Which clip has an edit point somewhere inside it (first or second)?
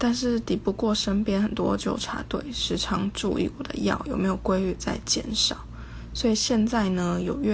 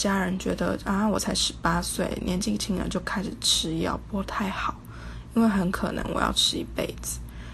second